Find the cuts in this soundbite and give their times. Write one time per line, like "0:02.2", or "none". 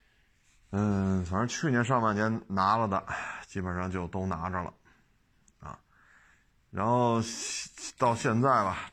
none